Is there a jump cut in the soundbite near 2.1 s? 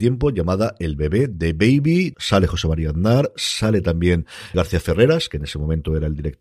yes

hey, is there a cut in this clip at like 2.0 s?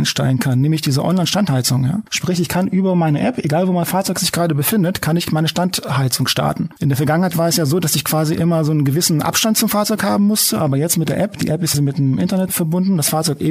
no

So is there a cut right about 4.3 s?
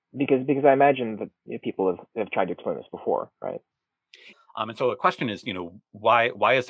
yes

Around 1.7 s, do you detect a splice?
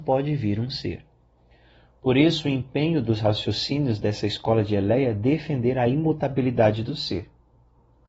no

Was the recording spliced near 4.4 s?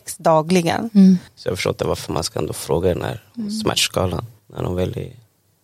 yes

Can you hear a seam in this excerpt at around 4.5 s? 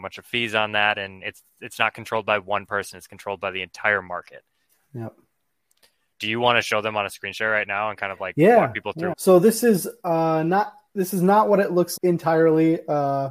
no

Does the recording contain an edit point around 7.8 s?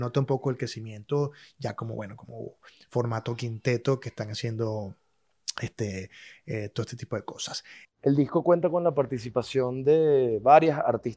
yes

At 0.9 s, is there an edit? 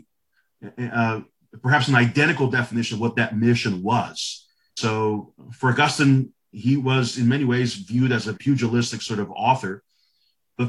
no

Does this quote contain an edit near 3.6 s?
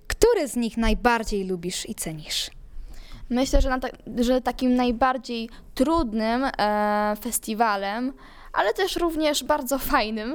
no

